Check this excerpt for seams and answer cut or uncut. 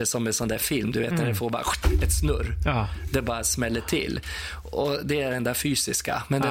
uncut